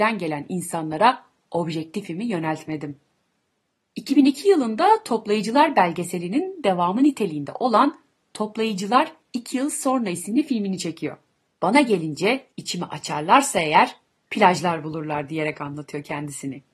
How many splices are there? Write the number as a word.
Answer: two